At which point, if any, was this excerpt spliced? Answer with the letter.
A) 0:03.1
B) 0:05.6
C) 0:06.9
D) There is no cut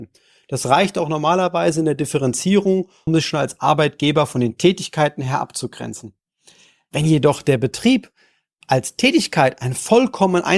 A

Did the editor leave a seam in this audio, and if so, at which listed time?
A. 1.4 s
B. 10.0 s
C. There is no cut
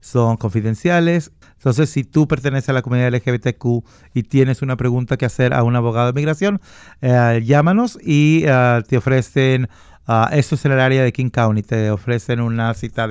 A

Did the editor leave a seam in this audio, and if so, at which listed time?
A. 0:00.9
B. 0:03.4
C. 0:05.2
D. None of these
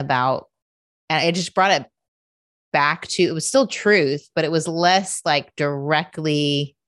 D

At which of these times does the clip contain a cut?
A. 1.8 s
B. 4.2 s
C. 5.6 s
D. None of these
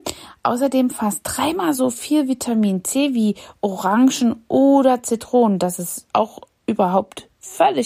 D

